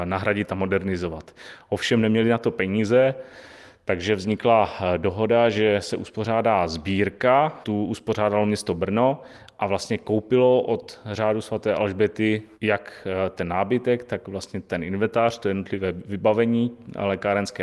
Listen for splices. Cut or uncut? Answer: uncut